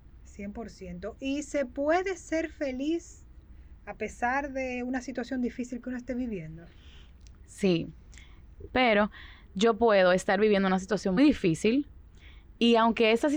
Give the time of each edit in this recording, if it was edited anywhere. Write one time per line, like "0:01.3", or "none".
0:08.7
0:11.2